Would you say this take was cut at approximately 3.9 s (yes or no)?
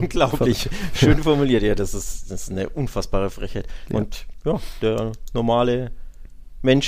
yes